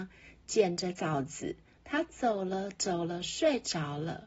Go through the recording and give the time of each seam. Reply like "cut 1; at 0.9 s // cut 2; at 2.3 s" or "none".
none